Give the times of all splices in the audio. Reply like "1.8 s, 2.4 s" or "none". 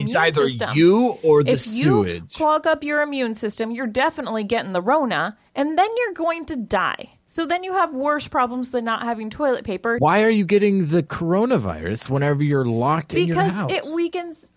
7.2 s, 10.0 s